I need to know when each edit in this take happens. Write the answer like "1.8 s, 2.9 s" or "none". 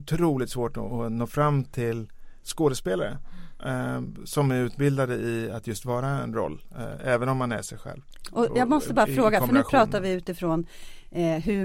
8.5 s